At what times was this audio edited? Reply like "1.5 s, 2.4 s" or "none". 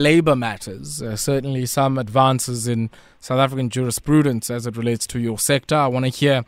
none